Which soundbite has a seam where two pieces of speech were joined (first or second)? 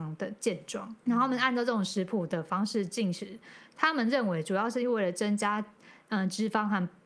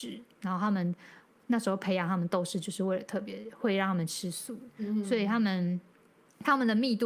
first